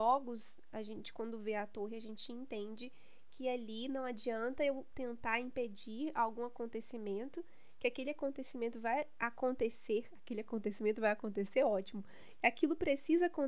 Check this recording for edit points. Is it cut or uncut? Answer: uncut